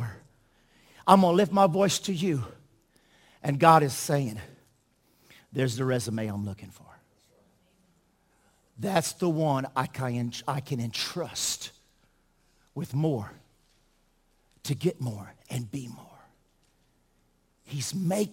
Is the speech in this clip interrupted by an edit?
no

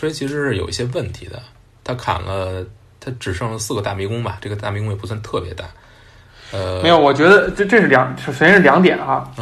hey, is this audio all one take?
yes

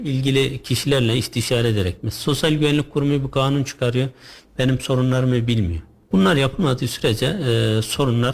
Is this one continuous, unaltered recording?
no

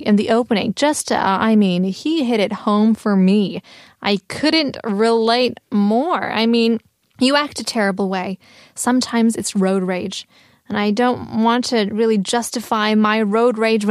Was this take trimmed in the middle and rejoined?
no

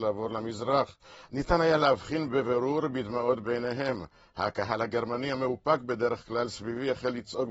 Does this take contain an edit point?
yes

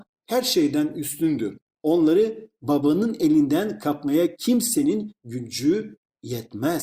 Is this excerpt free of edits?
yes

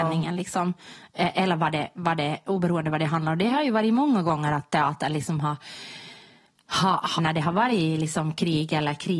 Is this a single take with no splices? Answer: no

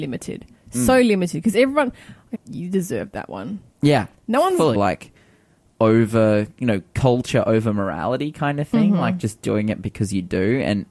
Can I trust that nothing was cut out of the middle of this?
no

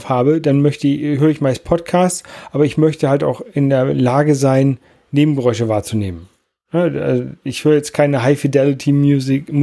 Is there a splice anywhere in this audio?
no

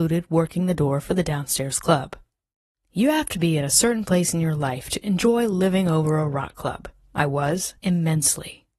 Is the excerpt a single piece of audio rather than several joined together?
no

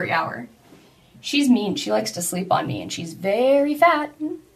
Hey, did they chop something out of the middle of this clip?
no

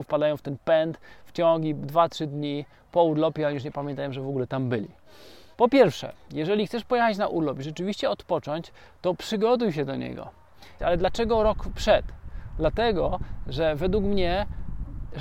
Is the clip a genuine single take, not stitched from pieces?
no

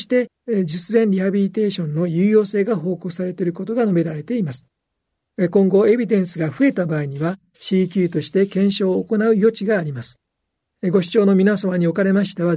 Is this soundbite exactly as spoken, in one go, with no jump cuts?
yes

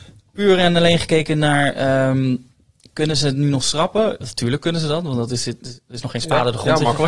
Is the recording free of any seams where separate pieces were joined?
yes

